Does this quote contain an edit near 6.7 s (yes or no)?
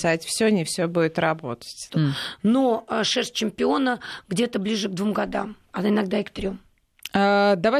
no